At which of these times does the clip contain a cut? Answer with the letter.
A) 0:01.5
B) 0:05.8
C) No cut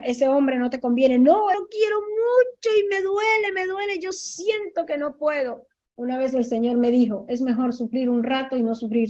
A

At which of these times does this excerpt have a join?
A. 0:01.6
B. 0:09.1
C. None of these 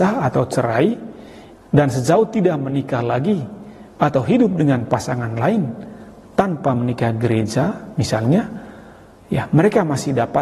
A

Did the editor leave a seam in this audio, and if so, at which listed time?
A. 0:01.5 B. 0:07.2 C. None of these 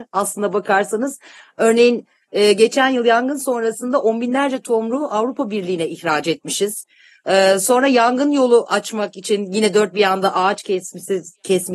C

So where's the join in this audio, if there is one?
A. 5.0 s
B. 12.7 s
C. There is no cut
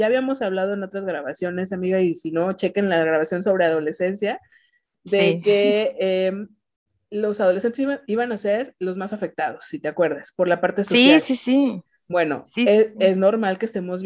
C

